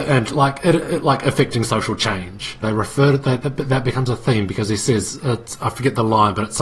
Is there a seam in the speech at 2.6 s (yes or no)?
yes